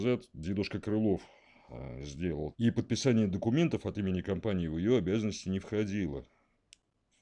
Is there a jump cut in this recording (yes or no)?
yes